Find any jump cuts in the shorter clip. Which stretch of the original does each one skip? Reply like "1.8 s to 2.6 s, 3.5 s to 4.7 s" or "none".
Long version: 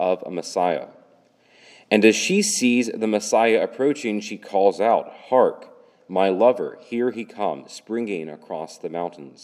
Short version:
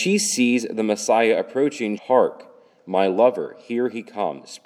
4.2 s to 5.2 s